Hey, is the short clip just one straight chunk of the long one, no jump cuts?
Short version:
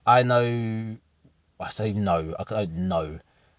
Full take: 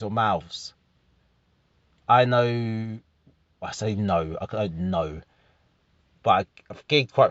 yes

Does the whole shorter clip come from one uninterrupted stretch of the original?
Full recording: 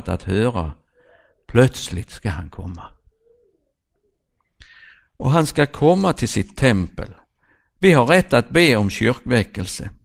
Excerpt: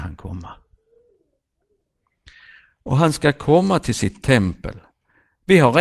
yes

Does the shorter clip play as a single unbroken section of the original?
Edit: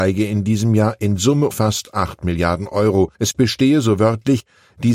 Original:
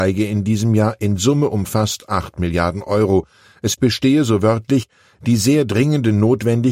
no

